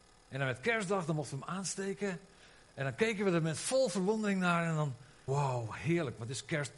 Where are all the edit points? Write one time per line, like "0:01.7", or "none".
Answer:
0:02.7
0:05.3